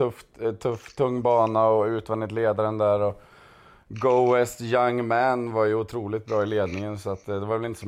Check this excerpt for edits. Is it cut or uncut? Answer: uncut